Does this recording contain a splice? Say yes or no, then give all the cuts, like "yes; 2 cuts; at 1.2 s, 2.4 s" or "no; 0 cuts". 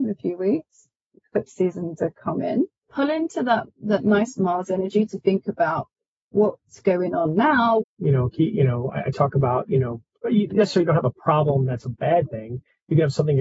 yes; 2 cuts; at 2.9 s, 7.8 s